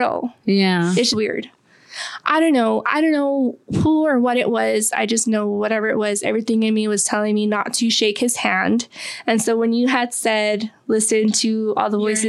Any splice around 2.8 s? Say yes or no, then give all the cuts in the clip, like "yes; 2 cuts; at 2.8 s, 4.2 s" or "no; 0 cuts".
no; 1 cut; at 1.1 s